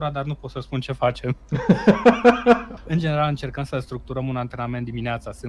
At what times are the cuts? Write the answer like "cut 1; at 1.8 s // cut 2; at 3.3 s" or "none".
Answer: cut 1; at 2.8 s